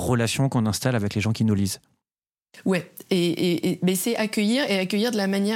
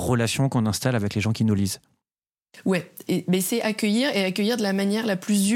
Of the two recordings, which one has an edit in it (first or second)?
second